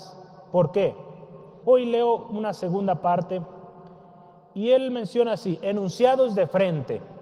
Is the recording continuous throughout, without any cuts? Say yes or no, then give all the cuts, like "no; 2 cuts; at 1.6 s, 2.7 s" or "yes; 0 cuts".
no; 1 cut; at 1.6 s